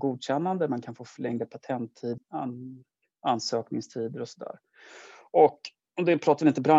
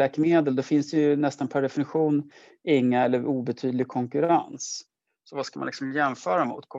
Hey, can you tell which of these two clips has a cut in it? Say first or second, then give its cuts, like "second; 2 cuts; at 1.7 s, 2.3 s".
first; 1 cut; at 2.2 s